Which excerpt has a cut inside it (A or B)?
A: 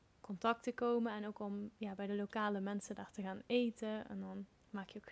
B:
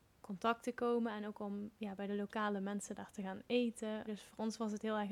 B